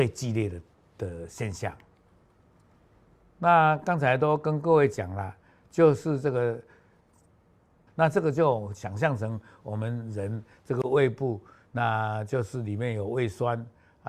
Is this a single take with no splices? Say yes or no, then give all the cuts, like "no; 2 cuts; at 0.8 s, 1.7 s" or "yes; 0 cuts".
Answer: no; 1 cut; at 7.9 s